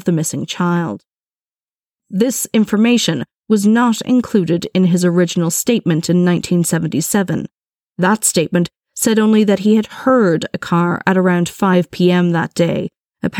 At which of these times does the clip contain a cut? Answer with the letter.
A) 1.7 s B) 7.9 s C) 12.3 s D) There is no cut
D